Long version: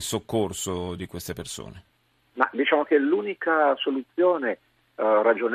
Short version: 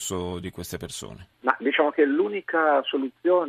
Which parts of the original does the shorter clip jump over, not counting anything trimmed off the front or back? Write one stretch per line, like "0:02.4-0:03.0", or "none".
0:01.9-0:02.3